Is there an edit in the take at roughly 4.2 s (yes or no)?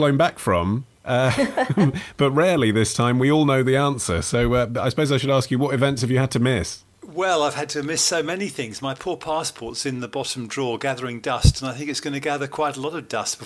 no